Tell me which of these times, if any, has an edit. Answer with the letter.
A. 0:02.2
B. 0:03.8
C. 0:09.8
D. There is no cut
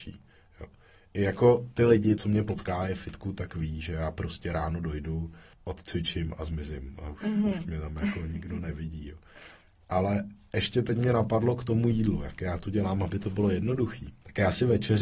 A